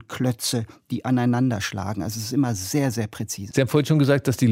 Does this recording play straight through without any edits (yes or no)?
no